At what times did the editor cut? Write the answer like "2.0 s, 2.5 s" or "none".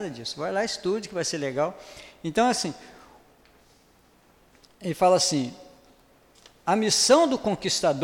none